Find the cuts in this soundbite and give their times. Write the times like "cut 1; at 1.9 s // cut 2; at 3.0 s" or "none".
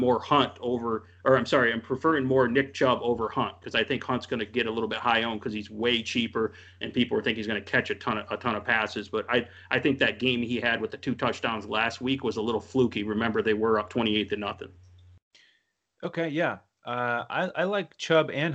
none